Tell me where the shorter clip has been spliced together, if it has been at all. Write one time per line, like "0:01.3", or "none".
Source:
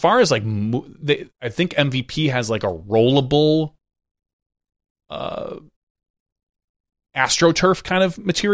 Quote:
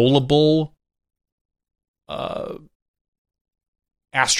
none